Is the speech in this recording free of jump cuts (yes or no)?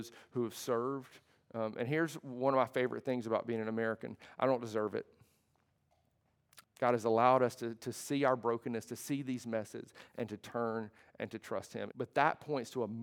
no